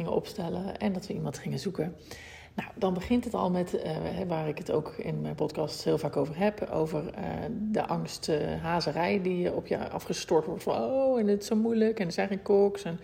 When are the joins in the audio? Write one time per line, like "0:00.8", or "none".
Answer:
none